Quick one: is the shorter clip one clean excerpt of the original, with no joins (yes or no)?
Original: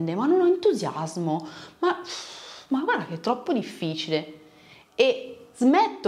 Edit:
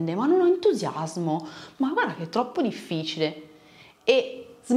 no